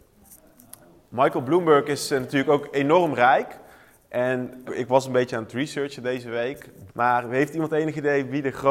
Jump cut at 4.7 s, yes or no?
yes